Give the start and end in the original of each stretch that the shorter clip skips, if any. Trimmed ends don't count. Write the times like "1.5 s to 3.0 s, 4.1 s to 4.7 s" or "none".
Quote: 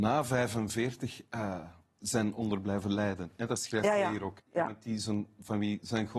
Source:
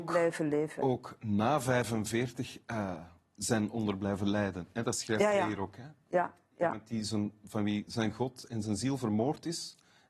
5.8 s to 6.4 s